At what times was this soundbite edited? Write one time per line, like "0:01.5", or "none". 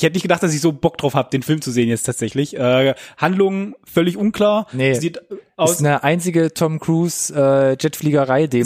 none